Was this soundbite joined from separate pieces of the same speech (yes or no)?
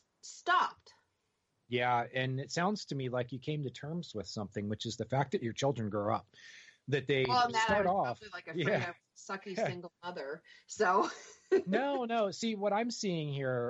no